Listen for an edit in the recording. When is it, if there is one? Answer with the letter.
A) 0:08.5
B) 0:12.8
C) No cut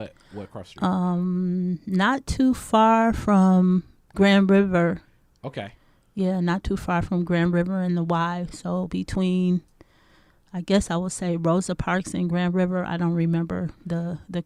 C